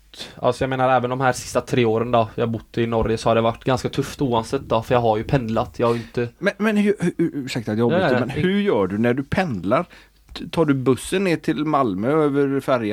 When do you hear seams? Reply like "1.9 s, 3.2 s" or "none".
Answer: none